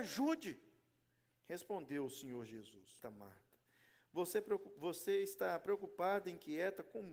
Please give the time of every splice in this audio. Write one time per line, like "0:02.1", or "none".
0:03.0

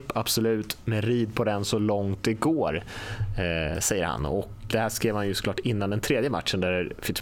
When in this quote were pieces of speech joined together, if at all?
0:04.7

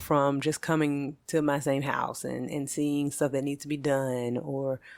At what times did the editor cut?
none

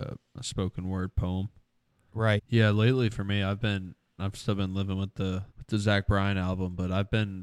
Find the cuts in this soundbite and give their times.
0:02.4
0:05.5

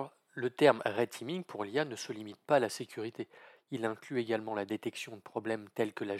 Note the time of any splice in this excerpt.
none

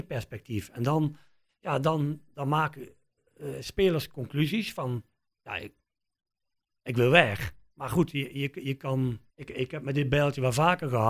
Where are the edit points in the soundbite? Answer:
0:09.3

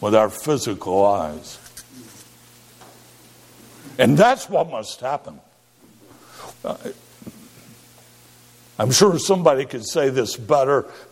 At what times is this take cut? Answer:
0:06.5

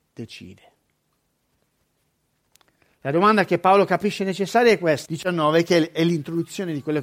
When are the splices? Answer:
0:05.1

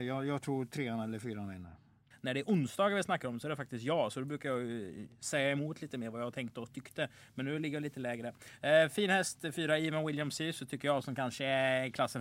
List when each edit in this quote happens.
0:02.1

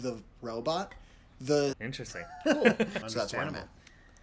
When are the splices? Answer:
0:01.7
0:03.0

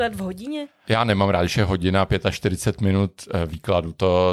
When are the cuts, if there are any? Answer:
none

